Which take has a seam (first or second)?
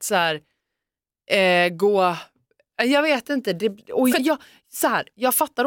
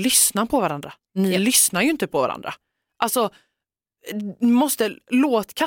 first